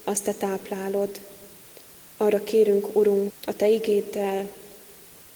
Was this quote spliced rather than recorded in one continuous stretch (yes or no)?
yes